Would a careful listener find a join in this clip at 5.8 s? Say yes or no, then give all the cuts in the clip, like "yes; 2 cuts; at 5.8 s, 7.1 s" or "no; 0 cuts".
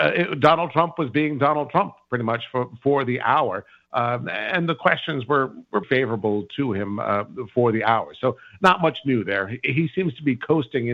yes; 1 cut; at 5.8 s